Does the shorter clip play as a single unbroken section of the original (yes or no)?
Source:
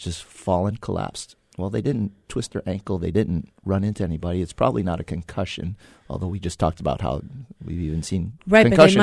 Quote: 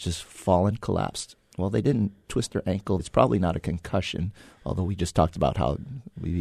no